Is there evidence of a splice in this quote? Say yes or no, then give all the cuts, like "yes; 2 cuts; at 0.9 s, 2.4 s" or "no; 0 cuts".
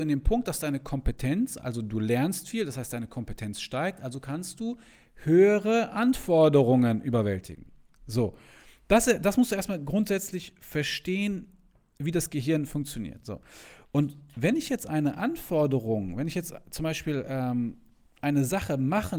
no; 0 cuts